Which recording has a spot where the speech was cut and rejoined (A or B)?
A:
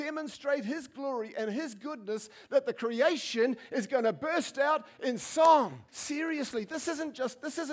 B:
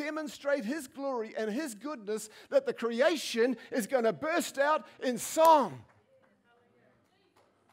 A